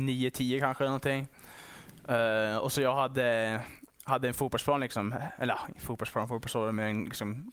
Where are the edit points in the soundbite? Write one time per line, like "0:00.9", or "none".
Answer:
none